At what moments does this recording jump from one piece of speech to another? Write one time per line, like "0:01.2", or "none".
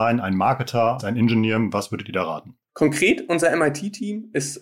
0:01.0
0:02.7